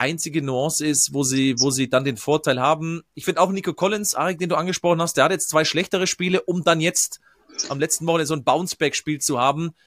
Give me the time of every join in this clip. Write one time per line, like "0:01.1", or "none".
none